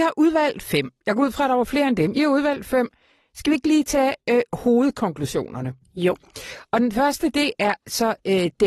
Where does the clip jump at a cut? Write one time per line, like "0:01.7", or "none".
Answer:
none